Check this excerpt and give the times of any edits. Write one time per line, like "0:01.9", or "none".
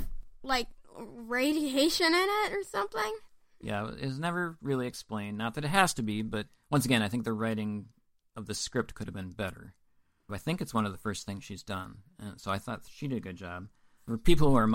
0:10.3